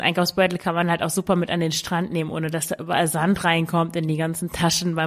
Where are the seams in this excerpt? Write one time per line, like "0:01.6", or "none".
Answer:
none